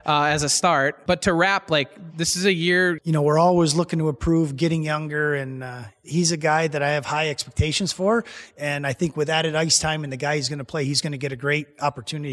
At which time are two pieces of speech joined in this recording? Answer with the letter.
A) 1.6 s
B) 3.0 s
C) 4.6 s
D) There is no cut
B